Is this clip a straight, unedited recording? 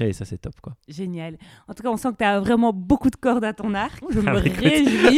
no; 1 cut; at 4.0 s

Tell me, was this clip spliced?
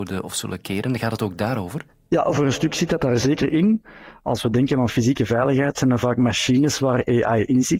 no; 0 cuts

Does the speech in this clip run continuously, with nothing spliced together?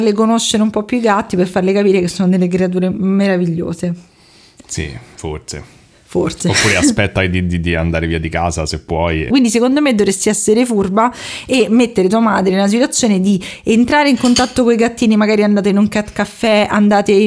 no; 1 cut; at 9.3 s

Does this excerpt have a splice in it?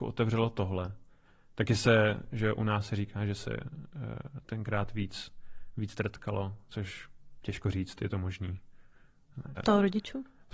yes; 1 cut; at 9.6 s

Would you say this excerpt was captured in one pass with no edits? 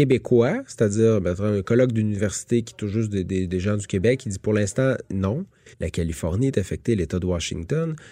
no; 1 cut; at 5.7 s

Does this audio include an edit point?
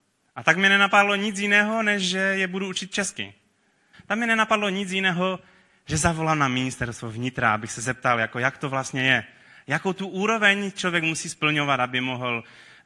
yes; 1 cut; at 3.9 s

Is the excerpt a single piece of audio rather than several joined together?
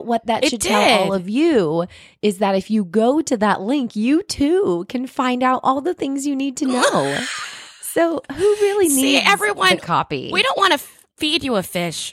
yes; 0 cuts

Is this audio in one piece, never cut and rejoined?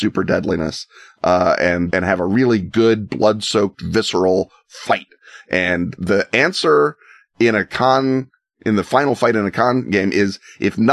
no; 1 cut; at 1.9 s

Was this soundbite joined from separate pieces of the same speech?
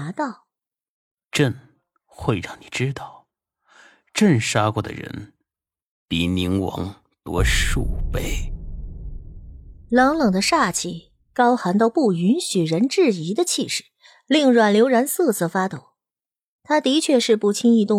no; 0 cuts

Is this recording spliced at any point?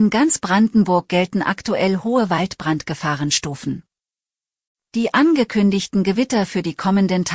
no; 0 cuts

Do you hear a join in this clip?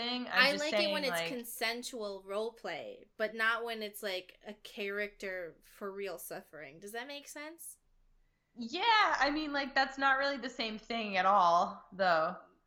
no; 0 cuts

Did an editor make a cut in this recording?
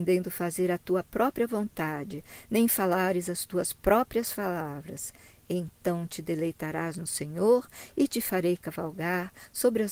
no; 0 cuts

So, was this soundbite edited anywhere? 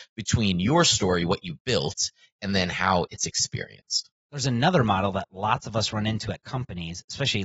no; 0 cuts

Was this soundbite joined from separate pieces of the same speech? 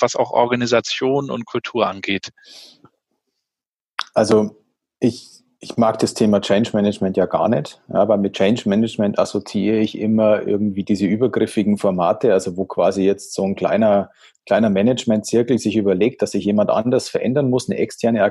no; 0 cuts

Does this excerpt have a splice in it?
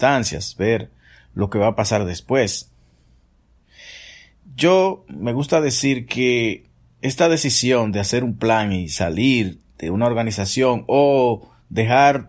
no; 0 cuts

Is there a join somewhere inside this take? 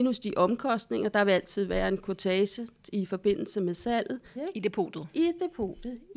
yes; 1 cut; at 4.4 s

